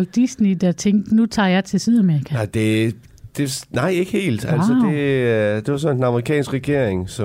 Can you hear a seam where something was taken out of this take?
no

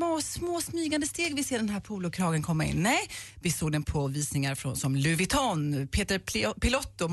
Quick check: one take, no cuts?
yes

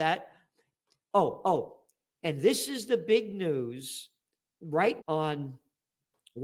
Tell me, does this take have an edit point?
yes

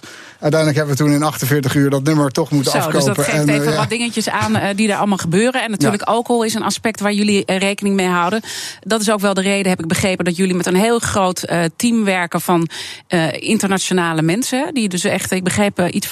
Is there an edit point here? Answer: no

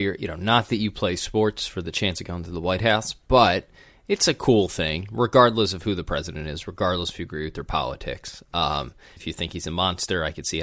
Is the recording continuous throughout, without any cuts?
no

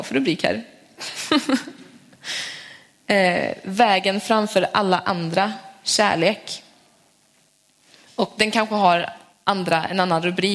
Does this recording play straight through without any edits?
yes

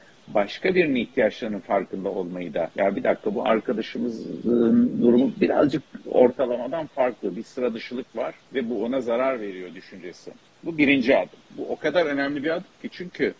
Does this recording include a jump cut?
yes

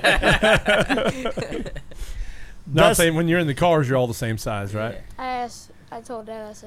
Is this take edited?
no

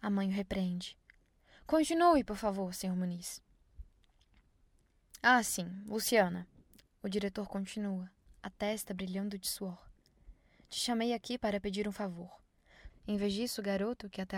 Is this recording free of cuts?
no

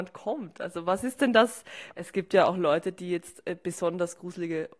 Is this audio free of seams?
no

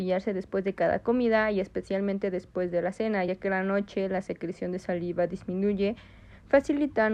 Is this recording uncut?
yes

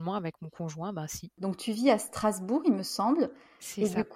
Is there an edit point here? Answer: yes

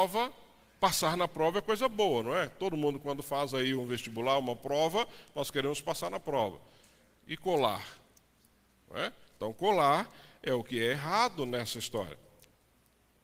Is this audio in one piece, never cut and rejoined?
yes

